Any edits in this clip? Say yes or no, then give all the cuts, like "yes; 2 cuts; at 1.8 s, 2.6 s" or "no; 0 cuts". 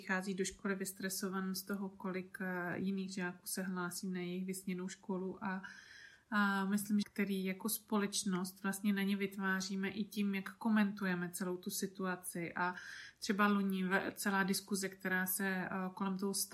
yes; 1 cut; at 7.0 s